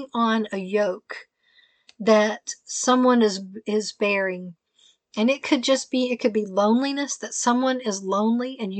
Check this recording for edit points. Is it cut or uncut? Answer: uncut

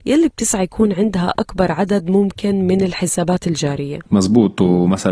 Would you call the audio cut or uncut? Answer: uncut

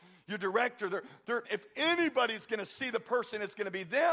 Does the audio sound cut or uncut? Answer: cut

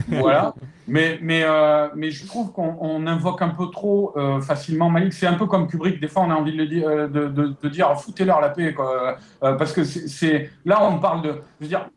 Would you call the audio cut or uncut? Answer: uncut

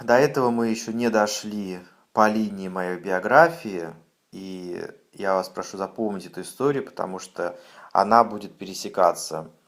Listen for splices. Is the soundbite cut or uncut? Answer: uncut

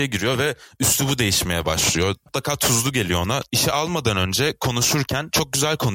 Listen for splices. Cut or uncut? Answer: cut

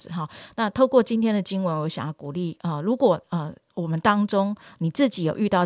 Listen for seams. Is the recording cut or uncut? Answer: uncut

